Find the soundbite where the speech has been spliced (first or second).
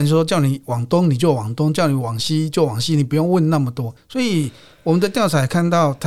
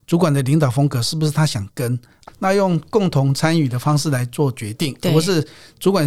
second